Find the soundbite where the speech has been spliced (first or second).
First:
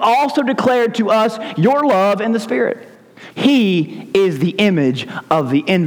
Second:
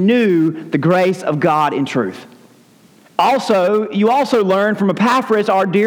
first